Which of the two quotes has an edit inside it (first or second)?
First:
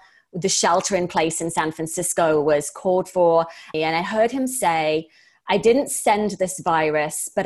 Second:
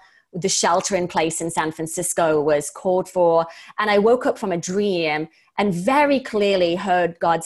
first